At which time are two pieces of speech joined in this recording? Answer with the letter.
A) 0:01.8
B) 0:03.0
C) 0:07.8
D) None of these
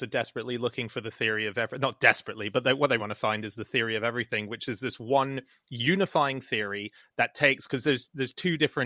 B